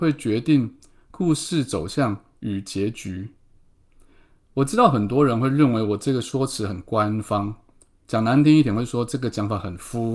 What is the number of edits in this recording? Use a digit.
0